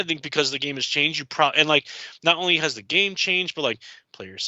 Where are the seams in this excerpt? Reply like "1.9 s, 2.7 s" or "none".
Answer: none